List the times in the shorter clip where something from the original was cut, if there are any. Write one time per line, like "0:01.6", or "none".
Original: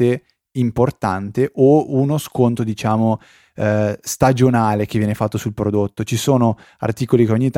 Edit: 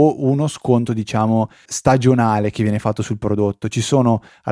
0:01.7